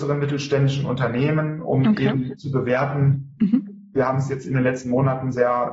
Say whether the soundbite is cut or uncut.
cut